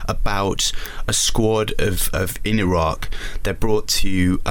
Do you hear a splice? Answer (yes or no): yes